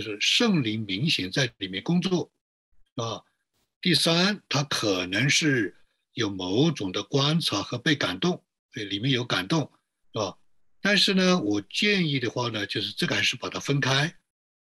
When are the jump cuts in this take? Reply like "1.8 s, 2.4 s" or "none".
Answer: 10.0 s